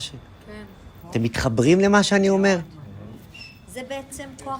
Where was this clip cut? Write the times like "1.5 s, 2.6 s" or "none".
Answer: 1.0 s